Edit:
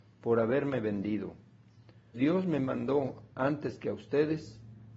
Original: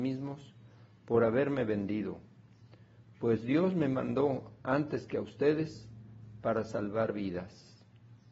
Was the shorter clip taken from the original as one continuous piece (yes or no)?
no